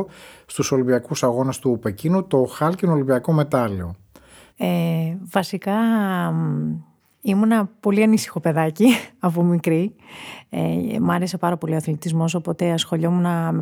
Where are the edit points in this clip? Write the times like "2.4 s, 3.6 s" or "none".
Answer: 4.5 s